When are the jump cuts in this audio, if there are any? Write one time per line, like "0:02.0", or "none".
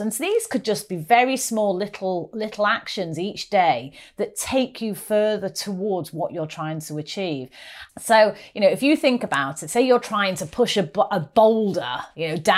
0:07.9